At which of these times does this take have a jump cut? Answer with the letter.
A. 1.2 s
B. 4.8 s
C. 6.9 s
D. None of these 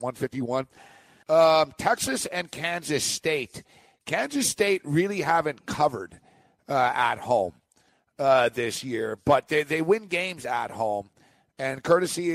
A